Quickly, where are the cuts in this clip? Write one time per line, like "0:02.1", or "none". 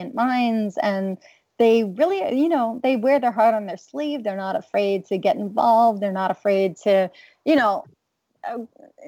none